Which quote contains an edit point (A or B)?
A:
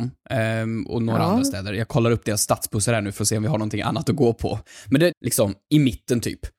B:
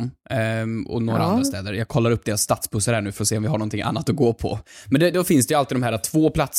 A